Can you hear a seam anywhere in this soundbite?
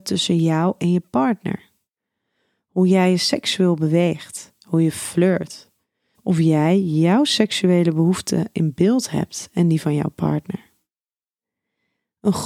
yes; 1 cut; at 6.1 s

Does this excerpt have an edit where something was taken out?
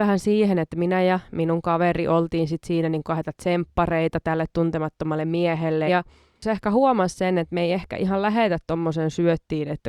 yes; 1 cut; at 5.9 s

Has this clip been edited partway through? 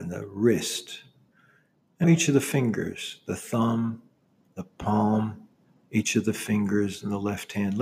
yes; 1 cut; at 2.0 s

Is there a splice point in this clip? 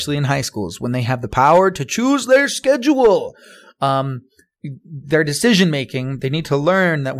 no; 0 cuts

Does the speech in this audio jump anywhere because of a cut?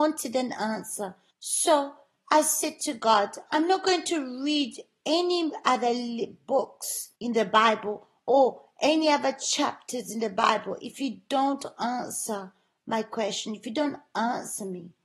yes; 2 cuts; at 1.3 s, 7.2 s

